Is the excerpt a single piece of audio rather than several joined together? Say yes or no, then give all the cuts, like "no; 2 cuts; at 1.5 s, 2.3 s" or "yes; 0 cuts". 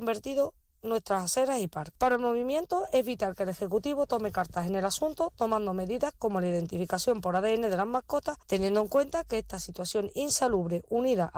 yes; 0 cuts